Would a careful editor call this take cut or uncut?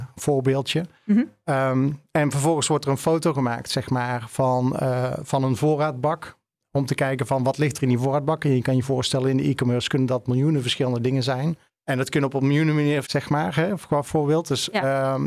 cut